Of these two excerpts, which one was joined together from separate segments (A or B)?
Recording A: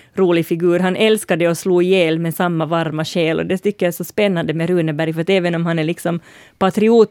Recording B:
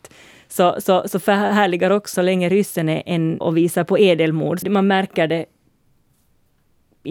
B